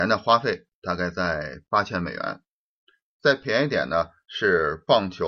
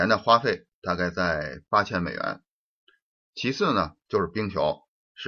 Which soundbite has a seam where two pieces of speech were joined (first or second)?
first